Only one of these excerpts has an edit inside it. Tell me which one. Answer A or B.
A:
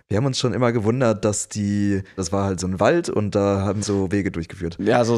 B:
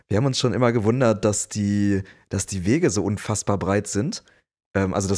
A